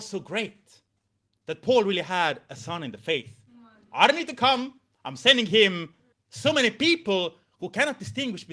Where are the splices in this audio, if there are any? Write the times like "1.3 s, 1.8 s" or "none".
6.1 s